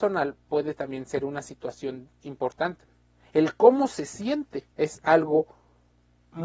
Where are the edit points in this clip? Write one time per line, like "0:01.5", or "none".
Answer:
0:02.2
0:04.7